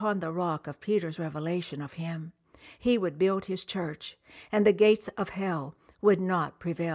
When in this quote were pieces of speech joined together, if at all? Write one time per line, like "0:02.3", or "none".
none